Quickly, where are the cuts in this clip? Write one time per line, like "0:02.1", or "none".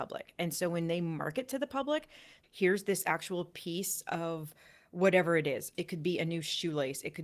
0:02.4